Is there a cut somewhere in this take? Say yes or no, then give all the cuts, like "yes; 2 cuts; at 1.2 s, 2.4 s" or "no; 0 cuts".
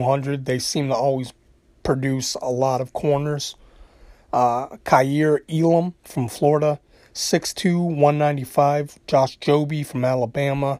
no; 0 cuts